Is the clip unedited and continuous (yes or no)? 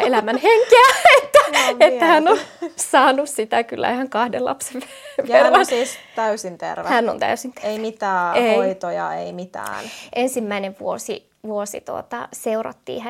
yes